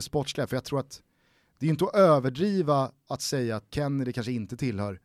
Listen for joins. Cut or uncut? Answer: cut